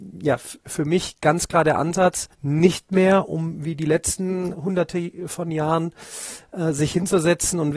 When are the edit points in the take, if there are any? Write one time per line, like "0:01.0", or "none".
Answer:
0:02.3
0:04.5